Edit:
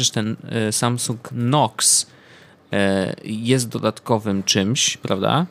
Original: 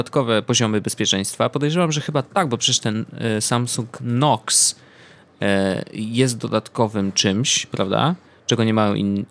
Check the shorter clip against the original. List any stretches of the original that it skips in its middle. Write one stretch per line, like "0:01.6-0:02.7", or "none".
none